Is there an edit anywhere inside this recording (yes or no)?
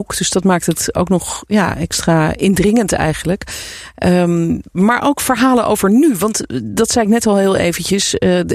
no